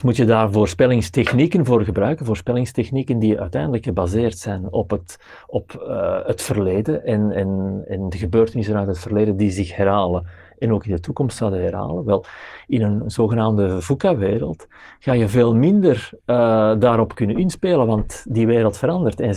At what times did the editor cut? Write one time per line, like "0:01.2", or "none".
none